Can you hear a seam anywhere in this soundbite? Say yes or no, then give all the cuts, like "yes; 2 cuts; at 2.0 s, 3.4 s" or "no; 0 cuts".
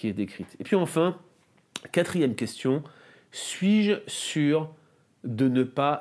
no; 0 cuts